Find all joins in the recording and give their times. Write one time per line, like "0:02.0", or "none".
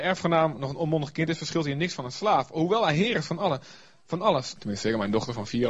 0:04.6